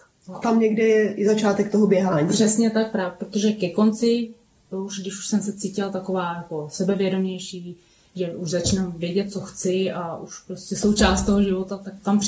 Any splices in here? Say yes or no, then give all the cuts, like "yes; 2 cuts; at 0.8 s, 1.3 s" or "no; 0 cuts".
no; 0 cuts